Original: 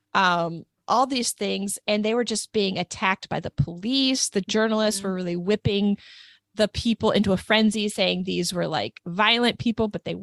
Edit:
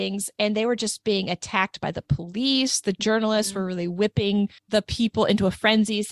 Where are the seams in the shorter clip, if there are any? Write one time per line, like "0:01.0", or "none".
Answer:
0:04.6